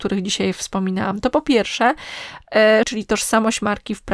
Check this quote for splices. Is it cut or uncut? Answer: cut